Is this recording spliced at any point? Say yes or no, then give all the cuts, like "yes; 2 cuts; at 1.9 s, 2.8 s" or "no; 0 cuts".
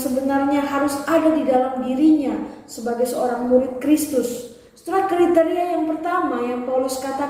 no; 0 cuts